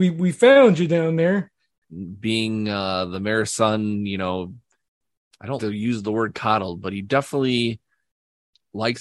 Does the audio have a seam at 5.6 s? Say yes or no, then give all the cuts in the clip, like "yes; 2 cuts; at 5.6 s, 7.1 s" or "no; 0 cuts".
yes; 2 cuts; at 1.8 s, 5.6 s